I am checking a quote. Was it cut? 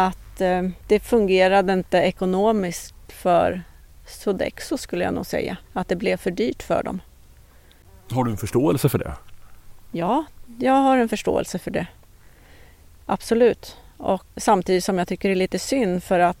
yes; 2 cuts; at 5.6 s, 14.4 s

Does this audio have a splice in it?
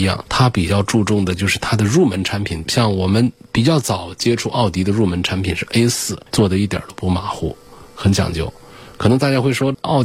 yes; 1 cut; at 6.3 s

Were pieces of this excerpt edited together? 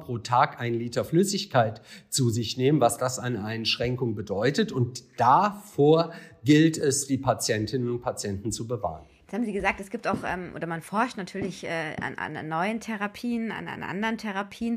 no; 0 cuts

